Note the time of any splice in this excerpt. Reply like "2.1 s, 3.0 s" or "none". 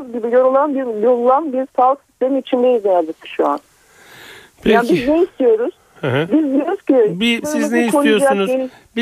7.4 s